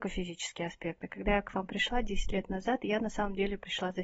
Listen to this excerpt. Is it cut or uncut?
uncut